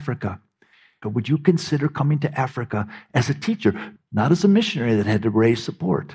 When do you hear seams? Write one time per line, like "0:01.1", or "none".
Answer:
0:01.0
0:04.0